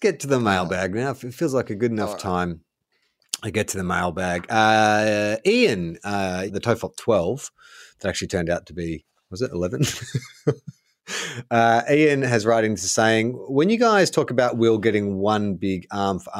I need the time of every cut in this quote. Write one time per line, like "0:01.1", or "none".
0:06.5